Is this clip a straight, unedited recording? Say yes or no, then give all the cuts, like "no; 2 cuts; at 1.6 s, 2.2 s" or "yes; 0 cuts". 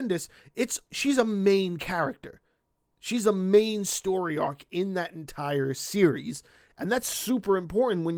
yes; 0 cuts